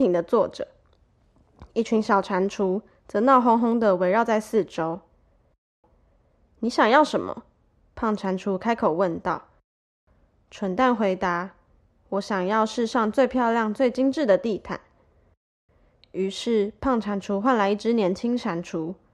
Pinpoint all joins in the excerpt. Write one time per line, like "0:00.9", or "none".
none